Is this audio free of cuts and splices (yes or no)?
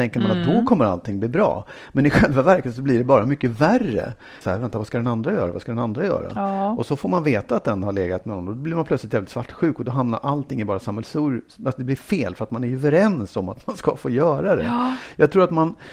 no